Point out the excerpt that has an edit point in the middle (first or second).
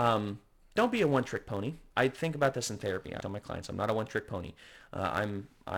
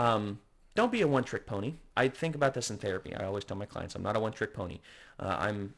first